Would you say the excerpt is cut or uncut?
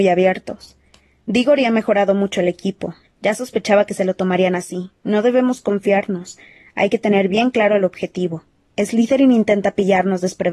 cut